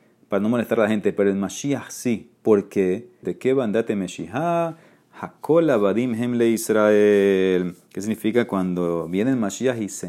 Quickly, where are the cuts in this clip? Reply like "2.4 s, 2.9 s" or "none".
3.2 s